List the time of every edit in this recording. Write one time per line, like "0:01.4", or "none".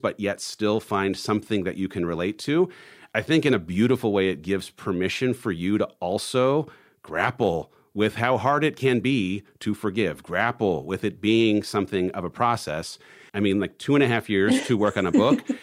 0:13.3